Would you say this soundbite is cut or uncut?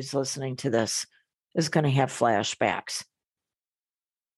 uncut